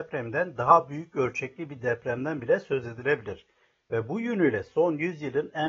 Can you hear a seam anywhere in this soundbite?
no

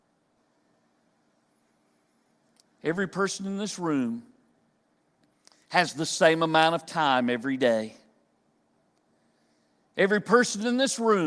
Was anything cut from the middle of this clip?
no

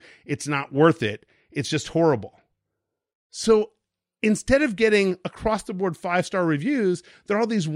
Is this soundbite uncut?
yes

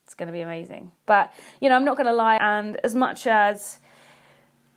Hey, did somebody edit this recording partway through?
yes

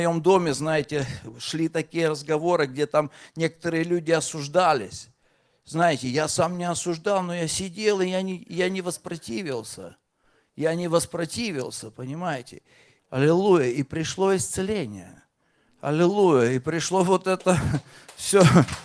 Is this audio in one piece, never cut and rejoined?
no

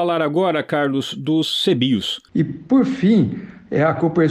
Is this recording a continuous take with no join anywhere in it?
no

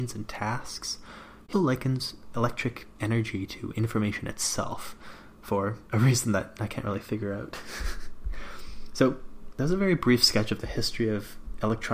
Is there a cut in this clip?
yes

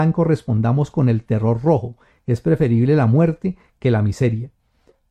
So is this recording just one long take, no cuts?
yes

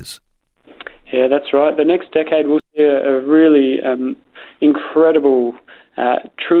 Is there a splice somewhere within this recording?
no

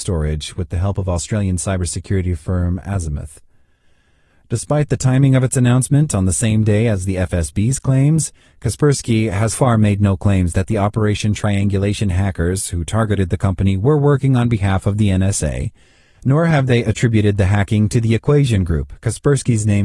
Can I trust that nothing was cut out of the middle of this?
no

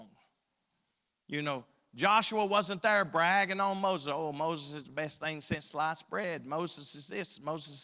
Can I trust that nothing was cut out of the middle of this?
yes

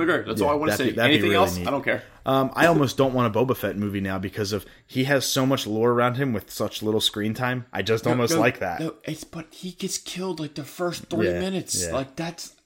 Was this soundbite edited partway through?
no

